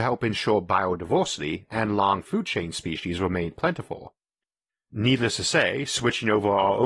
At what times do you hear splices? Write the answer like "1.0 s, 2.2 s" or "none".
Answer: none